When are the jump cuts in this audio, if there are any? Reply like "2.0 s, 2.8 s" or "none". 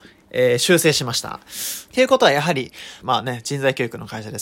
1.9 s, 3.0 s

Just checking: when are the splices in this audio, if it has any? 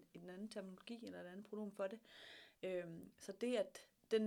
2.6 s

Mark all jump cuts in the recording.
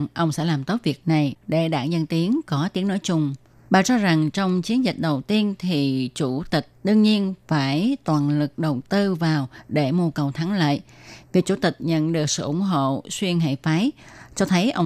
3.7 s, 11.2 s

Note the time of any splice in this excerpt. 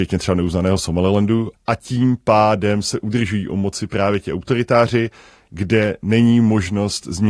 1.5 s

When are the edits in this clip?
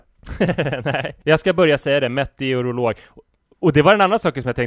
1.2 s

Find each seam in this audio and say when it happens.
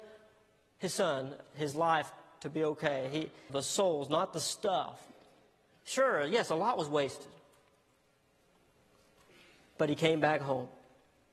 3.5 s

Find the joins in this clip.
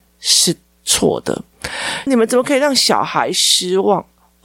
2.1 s

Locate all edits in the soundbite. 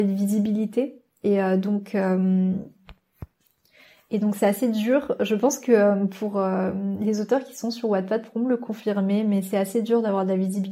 none

